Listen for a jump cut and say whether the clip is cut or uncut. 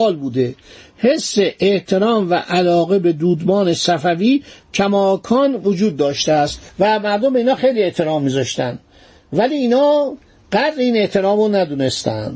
uncut